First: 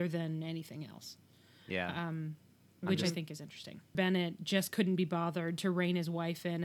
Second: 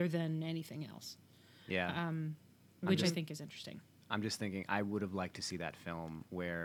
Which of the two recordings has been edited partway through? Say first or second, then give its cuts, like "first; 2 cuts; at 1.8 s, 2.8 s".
first; 1 cut; at 3.9 s